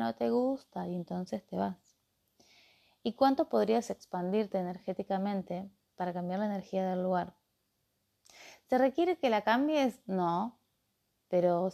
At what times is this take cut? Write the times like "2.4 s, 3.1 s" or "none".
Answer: none